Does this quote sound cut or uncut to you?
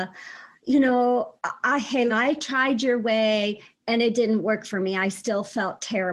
cut